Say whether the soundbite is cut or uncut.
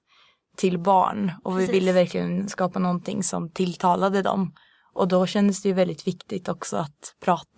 uncut